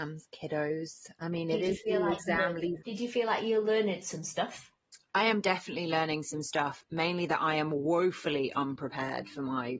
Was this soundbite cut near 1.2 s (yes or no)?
no